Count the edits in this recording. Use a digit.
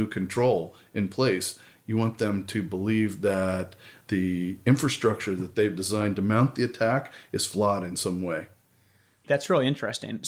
1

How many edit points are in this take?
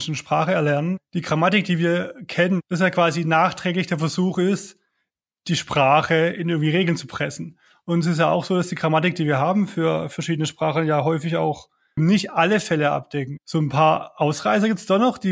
1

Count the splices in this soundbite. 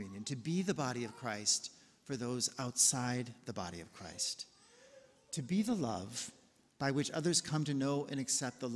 0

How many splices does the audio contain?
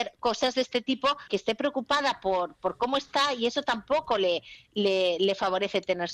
1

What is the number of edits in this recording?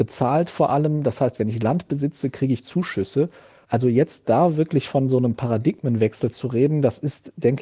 1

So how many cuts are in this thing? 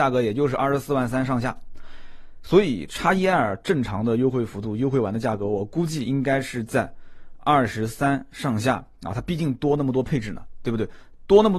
0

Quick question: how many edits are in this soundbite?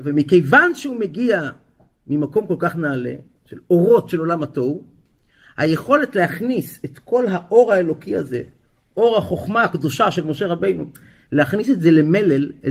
0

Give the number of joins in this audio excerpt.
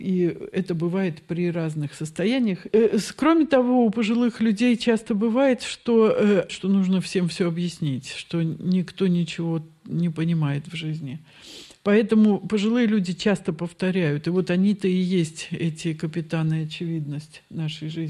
2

